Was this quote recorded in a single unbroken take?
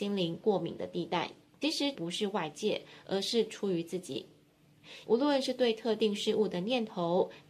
no; 2 cuts; at 1.9 s, 5.0 s

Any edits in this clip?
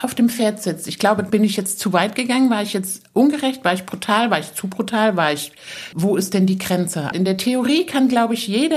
yes; 3 cuts; at 1.3 s, 5.9 s, 7.1 s

